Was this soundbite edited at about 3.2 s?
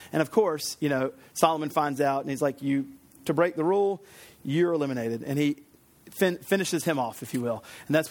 yes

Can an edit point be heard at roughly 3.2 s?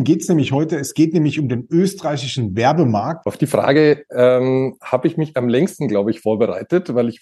yes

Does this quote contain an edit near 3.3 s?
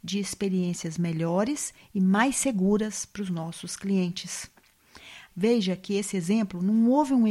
no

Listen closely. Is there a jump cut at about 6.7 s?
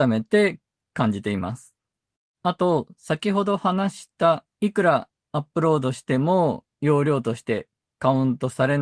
no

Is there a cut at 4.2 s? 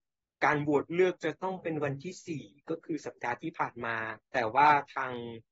yes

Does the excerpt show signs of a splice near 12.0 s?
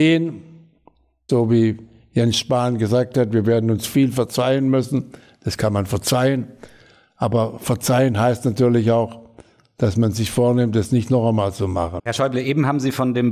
yes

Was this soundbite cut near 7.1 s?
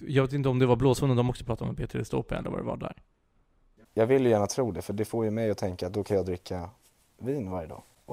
no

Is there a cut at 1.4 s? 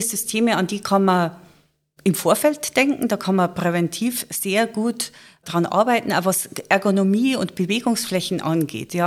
no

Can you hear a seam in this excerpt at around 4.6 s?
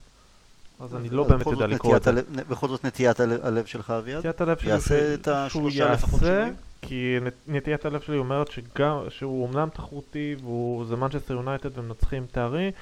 no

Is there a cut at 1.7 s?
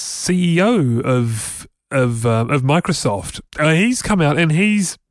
no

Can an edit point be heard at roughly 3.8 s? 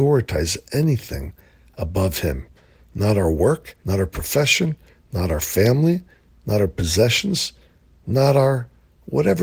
yes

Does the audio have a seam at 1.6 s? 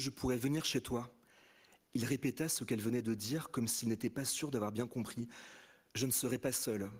no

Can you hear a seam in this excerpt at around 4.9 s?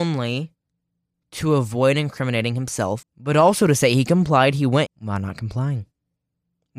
yes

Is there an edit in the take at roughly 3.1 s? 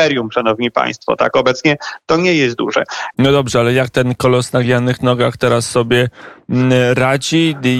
yes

